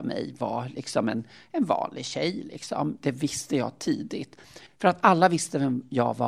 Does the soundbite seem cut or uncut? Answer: cut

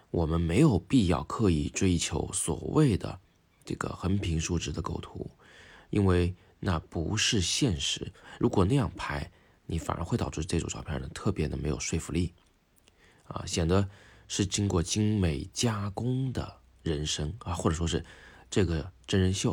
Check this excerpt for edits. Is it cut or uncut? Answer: uncut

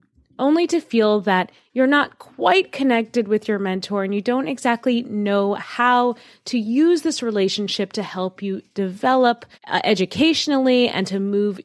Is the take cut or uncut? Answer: cut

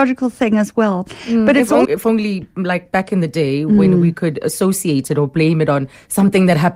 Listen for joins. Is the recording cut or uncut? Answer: cut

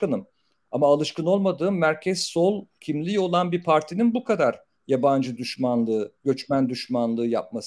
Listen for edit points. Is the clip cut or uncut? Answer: cut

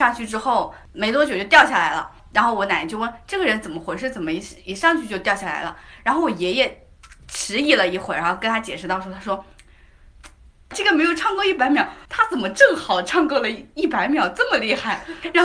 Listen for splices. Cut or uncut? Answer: cut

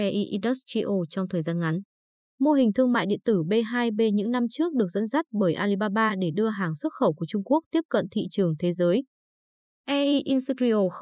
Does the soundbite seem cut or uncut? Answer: uncut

